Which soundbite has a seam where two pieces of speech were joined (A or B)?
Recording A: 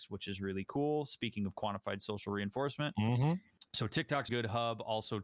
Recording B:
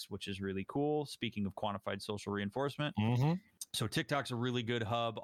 A